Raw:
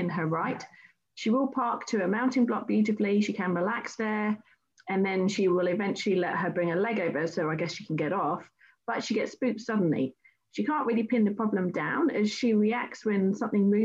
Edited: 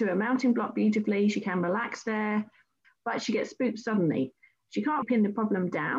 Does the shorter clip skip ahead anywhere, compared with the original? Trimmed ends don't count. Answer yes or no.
yes